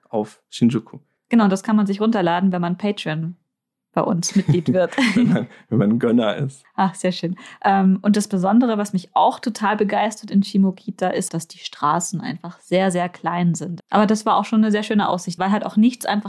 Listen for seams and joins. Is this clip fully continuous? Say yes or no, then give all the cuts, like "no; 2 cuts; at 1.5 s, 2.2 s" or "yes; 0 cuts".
no; 3 cuts; at 11.3 s, 13.8 s, 15.4 s